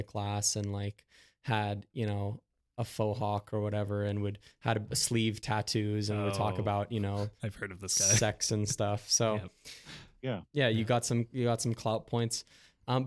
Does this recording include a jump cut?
yes; 1 cut; at 10.2 s

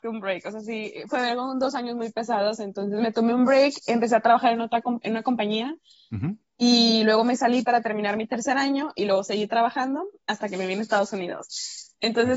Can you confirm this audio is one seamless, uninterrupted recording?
no; 1 cut; at 1.1 s

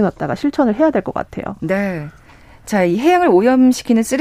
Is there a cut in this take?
no; 0 cuts

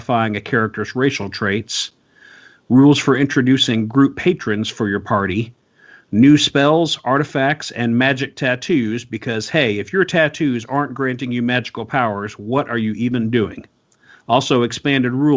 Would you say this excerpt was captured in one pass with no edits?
yes; 0 cuts

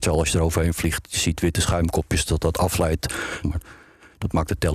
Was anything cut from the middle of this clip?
yes; 1 cut; at 3.4 s

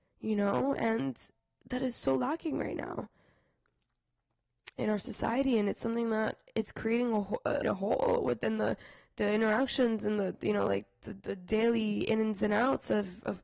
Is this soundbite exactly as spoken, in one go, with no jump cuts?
no; 1 cut; at 7.6 s

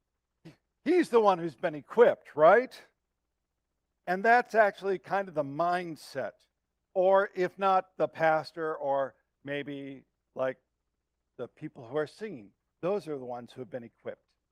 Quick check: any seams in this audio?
no; 0 cuts

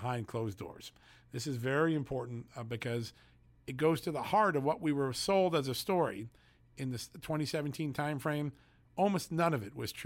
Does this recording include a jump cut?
no; 0 cuts

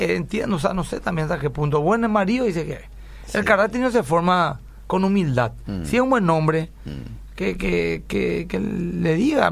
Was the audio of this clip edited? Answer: no; 0 cuts

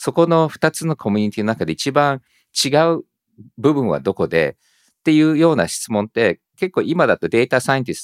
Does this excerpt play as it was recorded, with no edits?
yes; 0 cuts

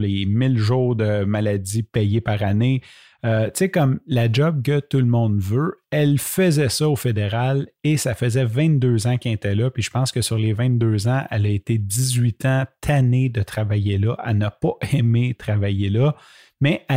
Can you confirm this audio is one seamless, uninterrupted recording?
yes; 0 cuts

